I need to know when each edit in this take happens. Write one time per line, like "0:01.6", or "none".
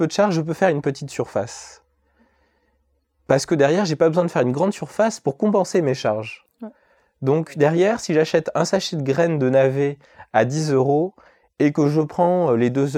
none

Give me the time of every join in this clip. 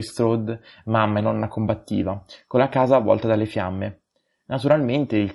none

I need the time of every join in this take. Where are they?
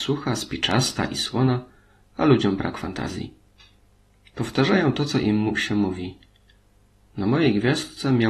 none

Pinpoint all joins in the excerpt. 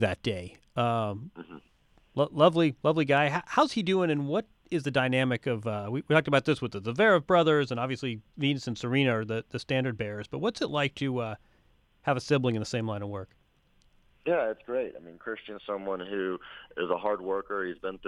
none

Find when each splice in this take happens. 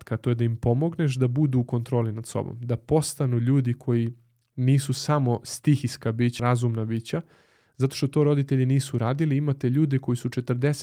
0:06.4

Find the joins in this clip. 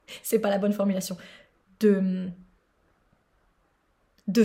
none

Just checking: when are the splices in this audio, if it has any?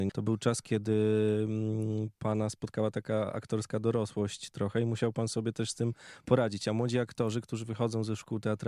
none

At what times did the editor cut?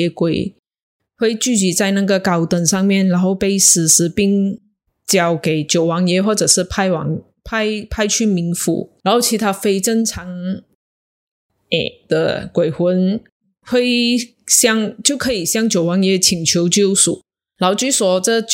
none

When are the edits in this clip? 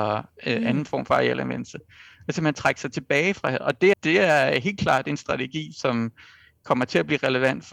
0:03.9

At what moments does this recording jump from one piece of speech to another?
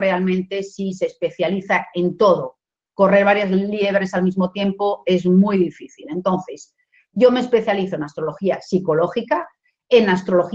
none

